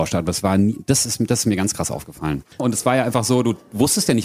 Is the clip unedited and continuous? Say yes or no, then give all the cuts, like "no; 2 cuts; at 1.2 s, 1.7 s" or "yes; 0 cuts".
no; 1 cut; at 2.6 s